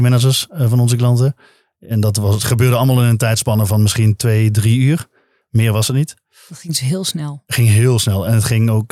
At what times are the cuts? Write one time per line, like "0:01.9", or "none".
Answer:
none